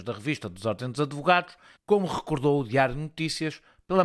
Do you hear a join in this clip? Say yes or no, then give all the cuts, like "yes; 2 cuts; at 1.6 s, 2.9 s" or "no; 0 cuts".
yes; 1 cut; at 1.7 s